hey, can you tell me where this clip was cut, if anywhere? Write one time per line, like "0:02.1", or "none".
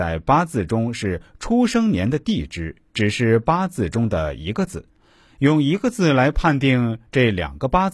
none